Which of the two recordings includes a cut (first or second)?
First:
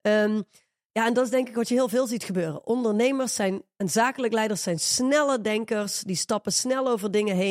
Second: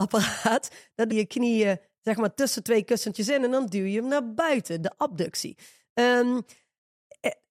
second